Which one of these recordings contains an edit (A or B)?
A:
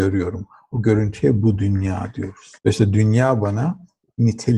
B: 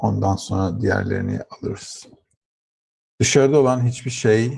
A